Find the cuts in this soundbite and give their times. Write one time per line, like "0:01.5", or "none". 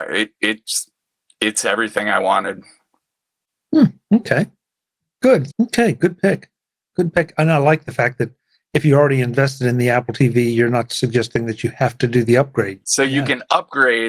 0:05.5
0:12.8

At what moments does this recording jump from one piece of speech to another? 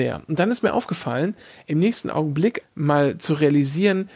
0:02.6

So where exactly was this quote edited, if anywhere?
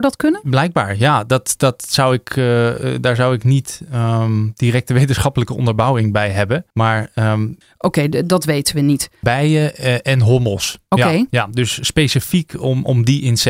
0:06.7
0:09.2

